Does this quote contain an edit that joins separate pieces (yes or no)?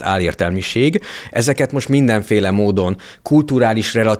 yes